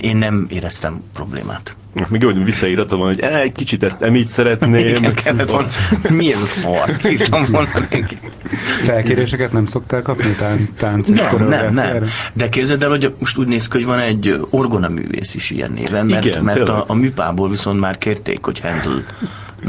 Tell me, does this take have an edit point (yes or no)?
yes